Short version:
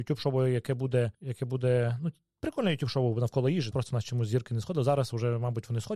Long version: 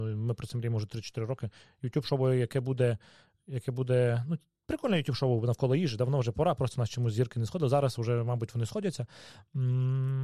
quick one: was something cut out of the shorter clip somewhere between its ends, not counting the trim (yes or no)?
yes